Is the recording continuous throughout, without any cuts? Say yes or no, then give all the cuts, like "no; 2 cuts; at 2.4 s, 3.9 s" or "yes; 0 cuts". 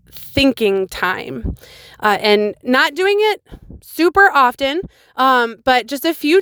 yes; 0 cuts